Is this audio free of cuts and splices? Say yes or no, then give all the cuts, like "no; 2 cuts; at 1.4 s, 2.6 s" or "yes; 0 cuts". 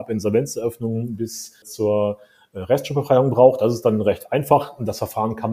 no; 1 cut; at 1.6 s